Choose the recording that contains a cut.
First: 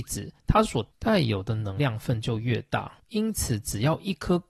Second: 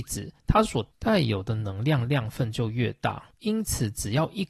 first; 1 cut; at 1.8 s

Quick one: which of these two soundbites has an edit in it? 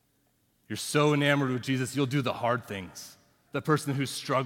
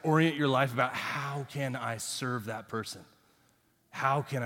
first; 1 cut; at 3.5 s

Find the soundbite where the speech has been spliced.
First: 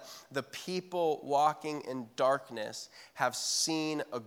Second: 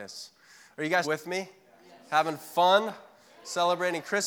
second; 1 cut; at 1.0 s

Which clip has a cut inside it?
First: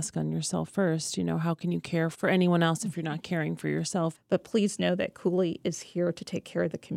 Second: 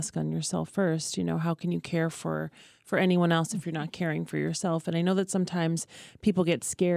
first; 2 cuts; at 2.1 s, 4.1 s

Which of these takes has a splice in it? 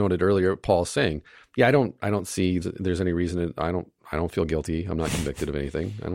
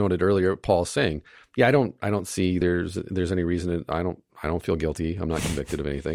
first; 1 cut; at 2.6 s

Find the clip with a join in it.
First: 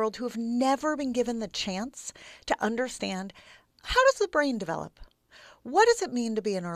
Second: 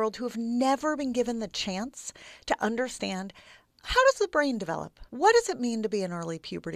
second; 1 cut; at 5.1 s

